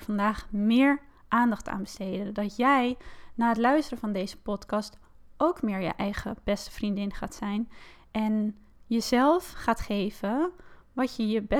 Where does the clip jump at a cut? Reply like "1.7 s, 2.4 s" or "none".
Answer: none